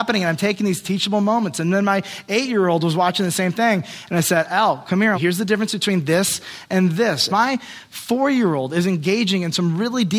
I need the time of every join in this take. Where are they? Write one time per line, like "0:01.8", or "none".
0:05.1
0:07.3